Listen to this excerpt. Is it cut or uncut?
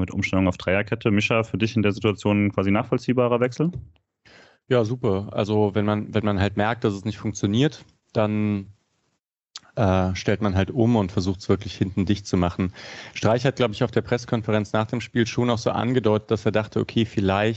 uncut